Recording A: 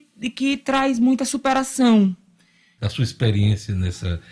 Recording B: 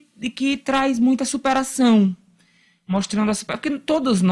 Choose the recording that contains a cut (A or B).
A